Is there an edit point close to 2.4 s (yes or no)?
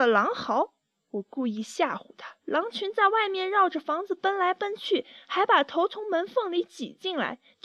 yes